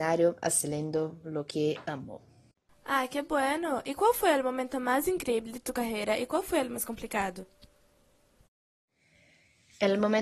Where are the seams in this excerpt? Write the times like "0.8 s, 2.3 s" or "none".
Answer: 2.7 s